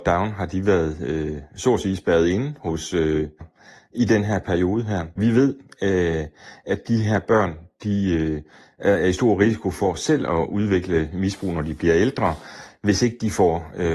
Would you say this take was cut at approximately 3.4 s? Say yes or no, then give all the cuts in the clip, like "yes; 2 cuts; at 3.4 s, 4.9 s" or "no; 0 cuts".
yes; 2 cuts; at 3.4 s, 5.2 s